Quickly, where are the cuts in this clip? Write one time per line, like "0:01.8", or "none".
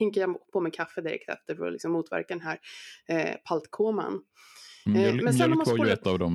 none